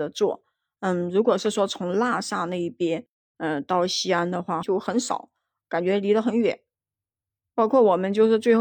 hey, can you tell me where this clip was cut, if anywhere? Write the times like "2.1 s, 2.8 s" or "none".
4.6 s